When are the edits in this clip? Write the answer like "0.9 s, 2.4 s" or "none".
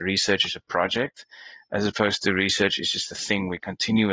none

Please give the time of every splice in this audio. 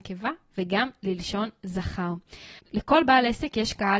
2.6 s

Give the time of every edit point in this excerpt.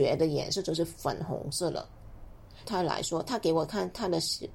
2.6 s

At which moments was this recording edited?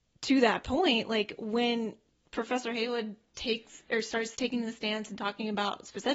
4.4 s

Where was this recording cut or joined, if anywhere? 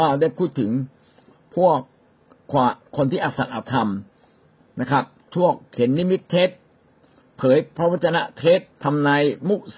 8.7 s

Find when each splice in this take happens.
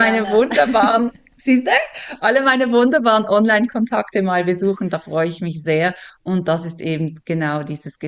none

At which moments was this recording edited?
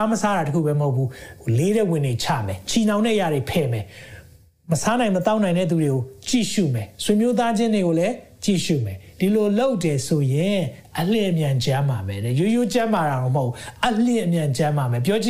none

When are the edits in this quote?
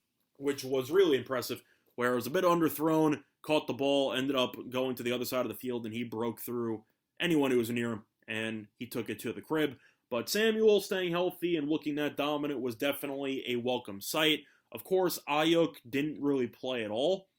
none

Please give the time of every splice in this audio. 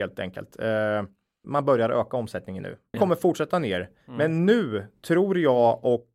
1.4 s, 2.9 s

